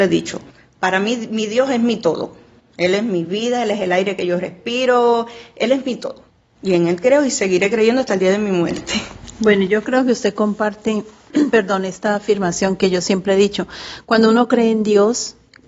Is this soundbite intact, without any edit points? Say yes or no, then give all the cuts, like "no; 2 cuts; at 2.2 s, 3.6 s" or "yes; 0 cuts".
yes; 0 cuts